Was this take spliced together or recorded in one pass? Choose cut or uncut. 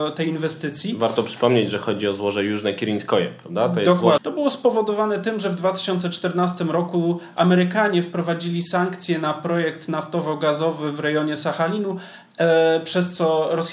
cut